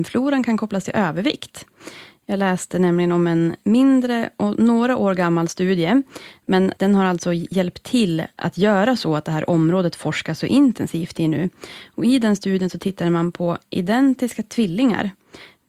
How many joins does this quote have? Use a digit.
0